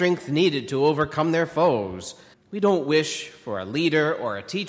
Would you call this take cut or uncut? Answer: cut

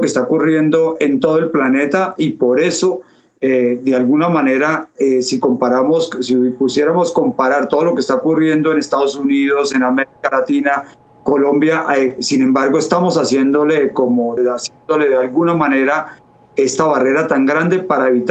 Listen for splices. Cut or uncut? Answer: cut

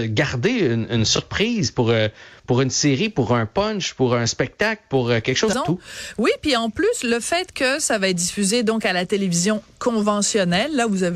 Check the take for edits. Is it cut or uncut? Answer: cut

